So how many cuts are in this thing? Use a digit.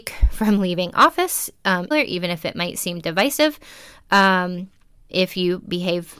2